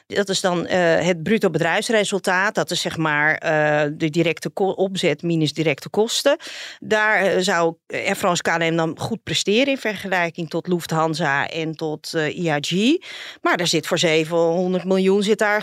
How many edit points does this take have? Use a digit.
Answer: 0